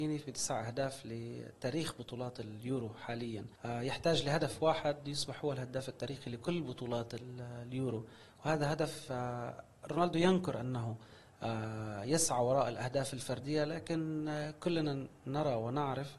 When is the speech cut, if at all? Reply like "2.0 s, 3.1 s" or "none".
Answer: 3.6 s